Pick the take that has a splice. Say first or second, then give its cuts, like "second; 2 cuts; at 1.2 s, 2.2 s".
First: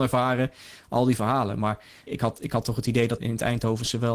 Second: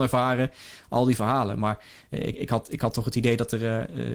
first; 2 cuts; at 2.1 s, 3.2 s